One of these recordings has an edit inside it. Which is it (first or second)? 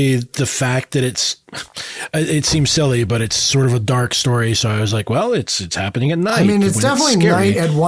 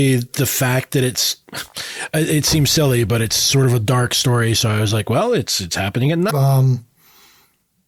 second